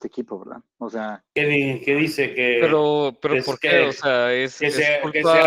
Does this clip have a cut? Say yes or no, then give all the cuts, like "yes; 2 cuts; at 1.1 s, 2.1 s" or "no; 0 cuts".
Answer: no; 0 cuts